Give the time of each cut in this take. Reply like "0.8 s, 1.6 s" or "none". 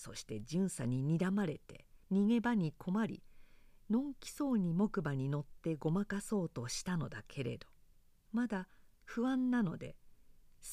2.0 s